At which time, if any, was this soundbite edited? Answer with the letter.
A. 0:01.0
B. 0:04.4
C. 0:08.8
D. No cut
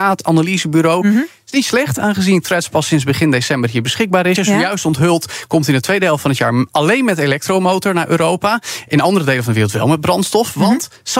B